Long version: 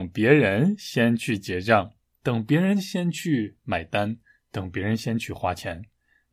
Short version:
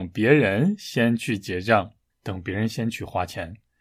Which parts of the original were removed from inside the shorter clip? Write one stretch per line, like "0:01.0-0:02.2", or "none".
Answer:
0:02.1-0:04.4